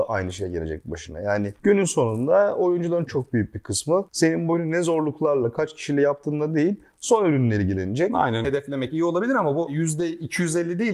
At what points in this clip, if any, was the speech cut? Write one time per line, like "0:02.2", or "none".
0:03.1
0:08.4